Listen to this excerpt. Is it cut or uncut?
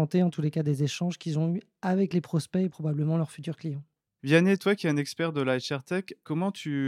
cut